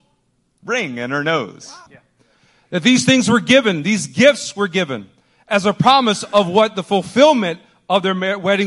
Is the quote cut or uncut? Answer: cut